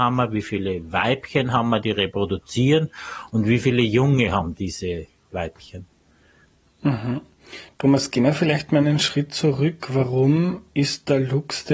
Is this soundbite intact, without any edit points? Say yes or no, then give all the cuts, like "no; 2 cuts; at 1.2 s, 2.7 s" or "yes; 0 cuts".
yes; 0 cuts